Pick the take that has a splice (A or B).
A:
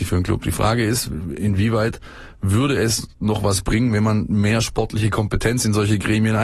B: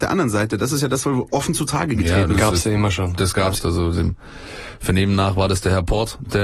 B